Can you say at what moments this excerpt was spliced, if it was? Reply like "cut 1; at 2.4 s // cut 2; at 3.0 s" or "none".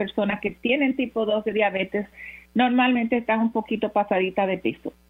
none